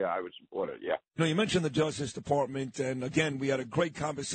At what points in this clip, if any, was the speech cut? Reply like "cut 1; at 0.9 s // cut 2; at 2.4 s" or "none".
none